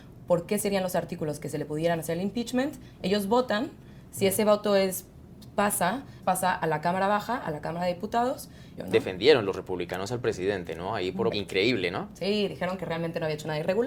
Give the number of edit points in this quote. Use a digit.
3